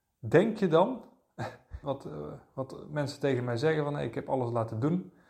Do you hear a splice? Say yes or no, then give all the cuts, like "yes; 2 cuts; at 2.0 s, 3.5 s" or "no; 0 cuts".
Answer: yes; 1 cut; at 1.8 s